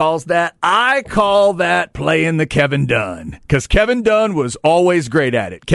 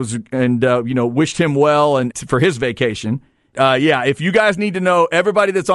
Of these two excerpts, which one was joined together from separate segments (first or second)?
second